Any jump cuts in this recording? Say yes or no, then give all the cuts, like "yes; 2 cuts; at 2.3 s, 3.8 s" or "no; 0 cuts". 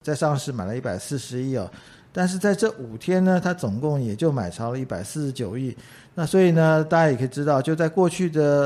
no; 0 cuts